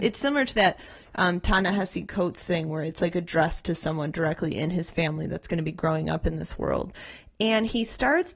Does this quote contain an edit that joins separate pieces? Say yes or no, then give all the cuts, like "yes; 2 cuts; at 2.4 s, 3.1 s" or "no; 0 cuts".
no; 0 cuts